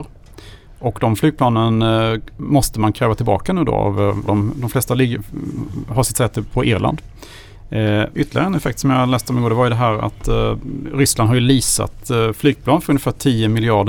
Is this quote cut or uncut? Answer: cut